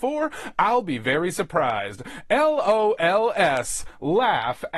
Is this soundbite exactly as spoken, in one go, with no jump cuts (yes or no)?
yes